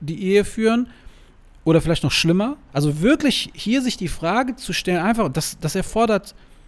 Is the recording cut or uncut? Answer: cut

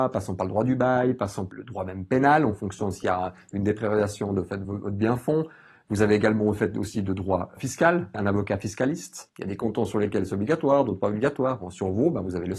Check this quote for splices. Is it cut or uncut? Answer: cut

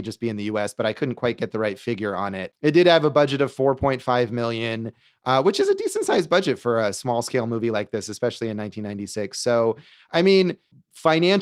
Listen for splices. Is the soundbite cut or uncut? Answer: uncut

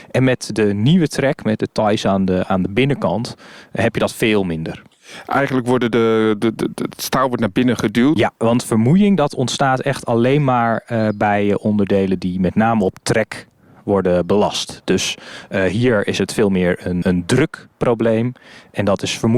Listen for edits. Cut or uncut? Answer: cut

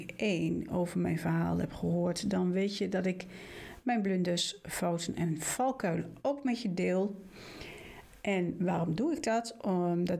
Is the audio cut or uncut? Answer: uncut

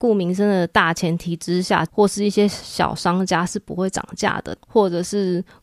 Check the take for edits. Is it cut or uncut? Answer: cut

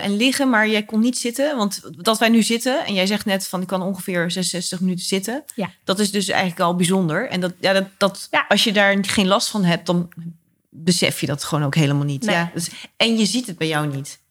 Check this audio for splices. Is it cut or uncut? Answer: uncut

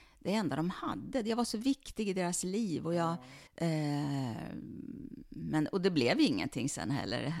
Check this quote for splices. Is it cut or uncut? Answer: cut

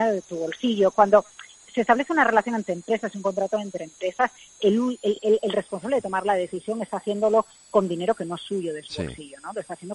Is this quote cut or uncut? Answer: uncut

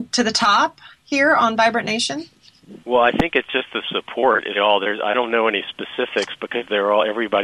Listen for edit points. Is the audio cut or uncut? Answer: cut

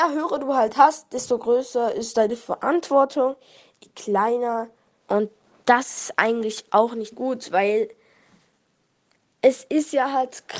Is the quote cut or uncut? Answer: cut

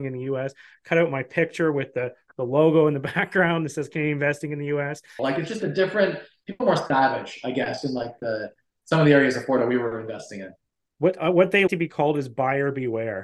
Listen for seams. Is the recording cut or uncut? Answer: cut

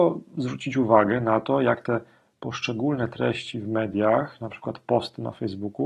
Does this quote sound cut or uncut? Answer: uncut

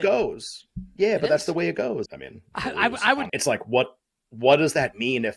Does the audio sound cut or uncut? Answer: cut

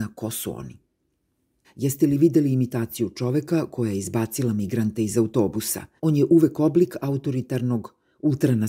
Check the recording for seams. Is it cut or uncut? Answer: cut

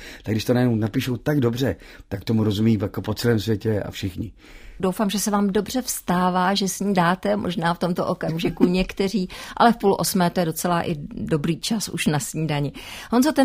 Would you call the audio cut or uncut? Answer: cut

